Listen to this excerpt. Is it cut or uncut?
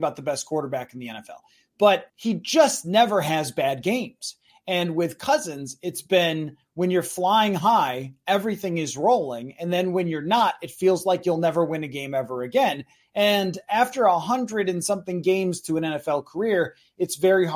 cut